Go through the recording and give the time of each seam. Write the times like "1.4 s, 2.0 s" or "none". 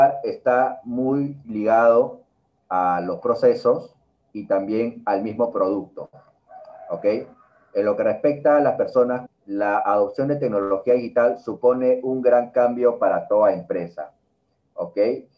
9.3 s